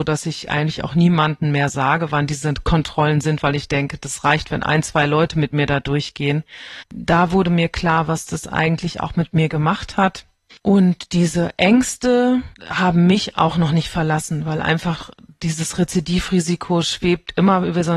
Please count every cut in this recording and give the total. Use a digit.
2